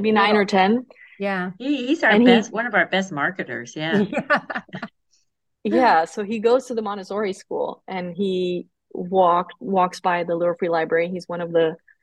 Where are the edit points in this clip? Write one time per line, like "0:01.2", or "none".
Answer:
none